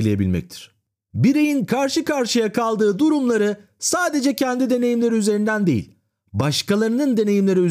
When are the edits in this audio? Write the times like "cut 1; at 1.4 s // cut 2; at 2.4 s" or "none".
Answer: none